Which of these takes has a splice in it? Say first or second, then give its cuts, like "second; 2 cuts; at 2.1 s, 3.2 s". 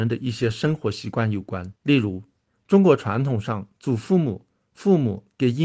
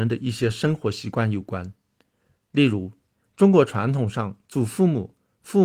first; 1 cut; at 1.8 s